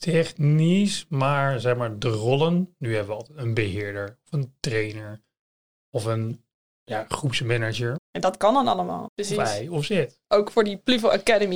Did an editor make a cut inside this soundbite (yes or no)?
yes